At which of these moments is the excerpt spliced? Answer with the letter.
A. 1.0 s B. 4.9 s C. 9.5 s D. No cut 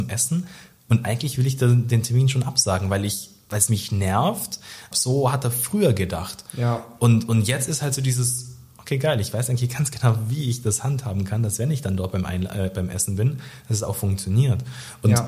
B